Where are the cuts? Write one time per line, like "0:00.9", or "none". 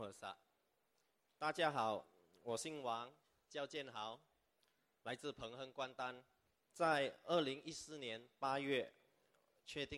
0:06.6